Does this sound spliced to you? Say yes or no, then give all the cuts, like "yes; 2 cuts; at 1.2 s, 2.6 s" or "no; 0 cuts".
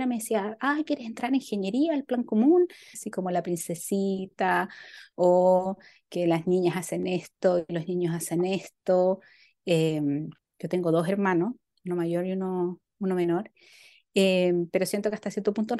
yes; 1 cut; at 2.9 s